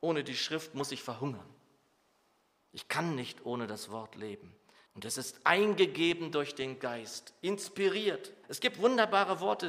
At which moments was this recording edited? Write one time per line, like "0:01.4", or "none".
0:04.9
0:08.4

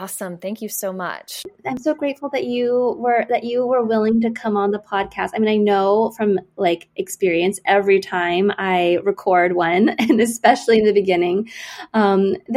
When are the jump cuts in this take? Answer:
none

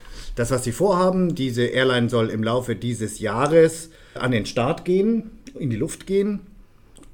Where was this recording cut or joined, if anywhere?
0:04.2

